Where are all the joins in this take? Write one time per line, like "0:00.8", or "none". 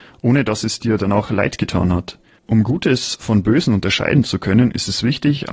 0:02.4